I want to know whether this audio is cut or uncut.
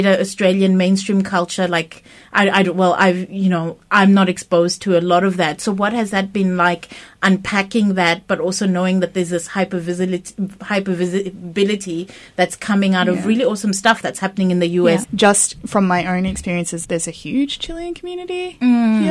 cut